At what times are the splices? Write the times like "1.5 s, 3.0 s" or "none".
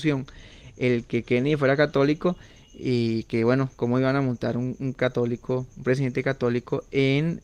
none